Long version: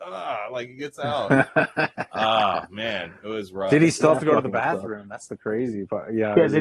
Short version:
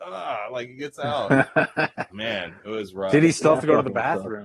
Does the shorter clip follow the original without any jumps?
no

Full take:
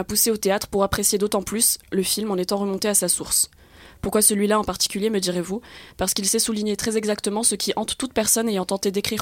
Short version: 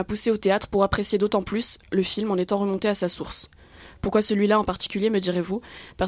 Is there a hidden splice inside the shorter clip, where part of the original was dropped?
no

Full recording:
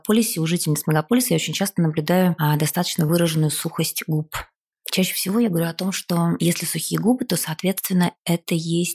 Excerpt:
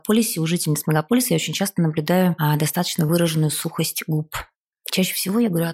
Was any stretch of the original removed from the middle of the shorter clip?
no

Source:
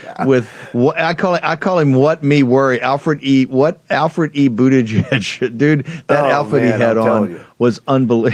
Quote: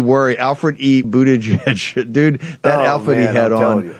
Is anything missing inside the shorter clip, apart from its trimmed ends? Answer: yes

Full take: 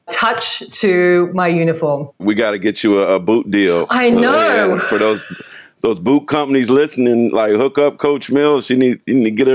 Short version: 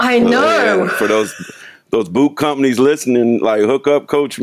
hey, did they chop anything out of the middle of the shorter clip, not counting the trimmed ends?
no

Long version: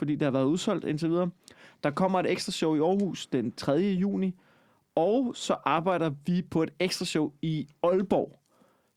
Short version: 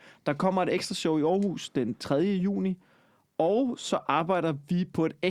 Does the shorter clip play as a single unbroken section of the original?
yes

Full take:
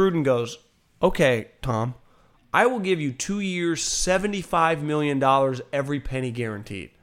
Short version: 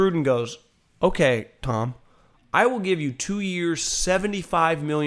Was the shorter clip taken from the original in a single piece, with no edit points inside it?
yes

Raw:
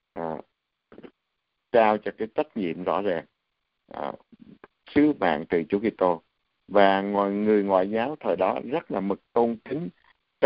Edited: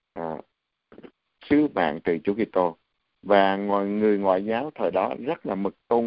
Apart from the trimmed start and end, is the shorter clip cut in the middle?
yes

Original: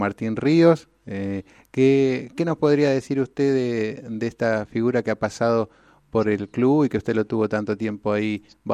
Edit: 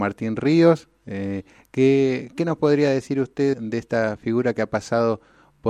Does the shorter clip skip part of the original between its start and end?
yes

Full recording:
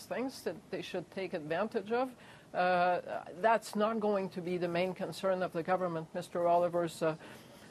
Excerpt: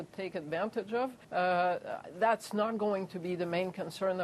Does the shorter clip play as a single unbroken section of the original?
no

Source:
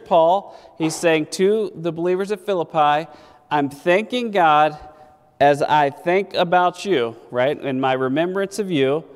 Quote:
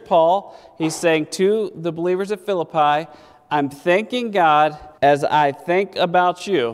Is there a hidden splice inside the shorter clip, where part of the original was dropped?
yes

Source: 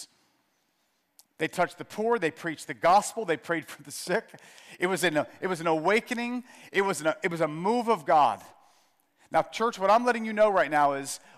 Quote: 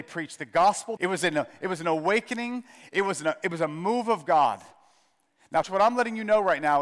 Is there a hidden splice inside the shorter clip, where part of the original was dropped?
yes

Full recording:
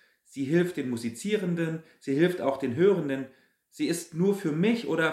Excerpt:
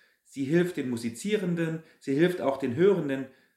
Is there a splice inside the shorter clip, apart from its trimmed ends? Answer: no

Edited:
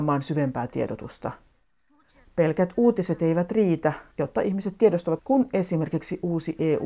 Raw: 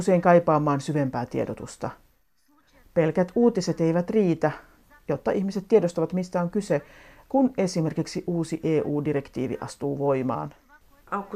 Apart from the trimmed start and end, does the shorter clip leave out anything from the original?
yes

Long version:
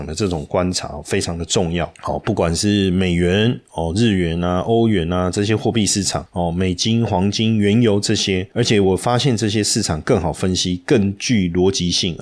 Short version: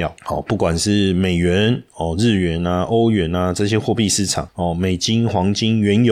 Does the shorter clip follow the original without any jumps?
yes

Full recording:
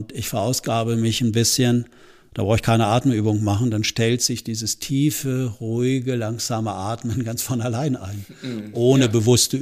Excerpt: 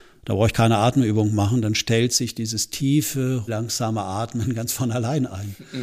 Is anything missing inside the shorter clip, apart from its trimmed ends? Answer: yes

